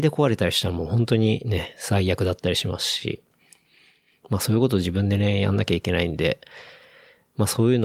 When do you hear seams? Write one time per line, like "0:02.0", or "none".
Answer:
none

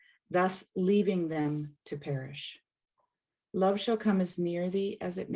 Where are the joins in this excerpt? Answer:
0:03.5

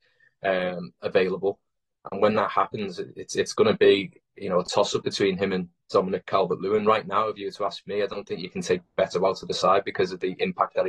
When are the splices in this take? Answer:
none

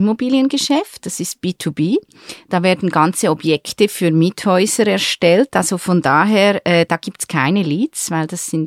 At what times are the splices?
none

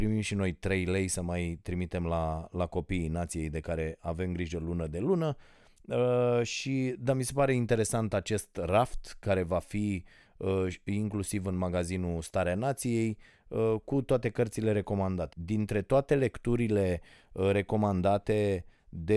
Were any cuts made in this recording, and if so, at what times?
0:15.3

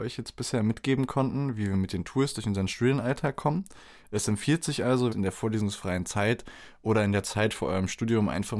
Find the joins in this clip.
0:05.1

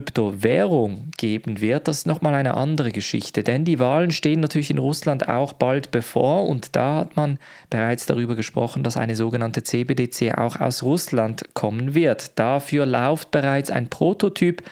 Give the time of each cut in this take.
none

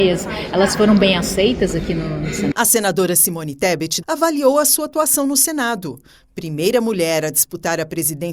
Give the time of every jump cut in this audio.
0:02.5
0:04.0

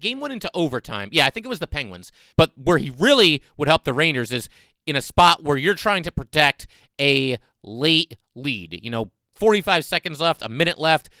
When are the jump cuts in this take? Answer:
0:02.3

